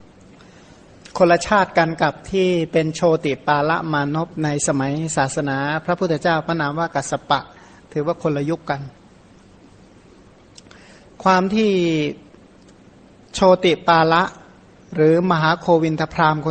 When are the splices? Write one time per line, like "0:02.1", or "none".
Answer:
none